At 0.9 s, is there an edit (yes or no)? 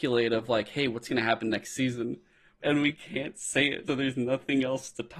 no